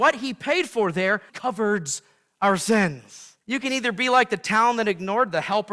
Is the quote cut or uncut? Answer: cut